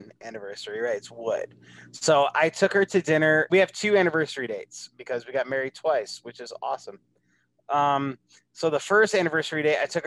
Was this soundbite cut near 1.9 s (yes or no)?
no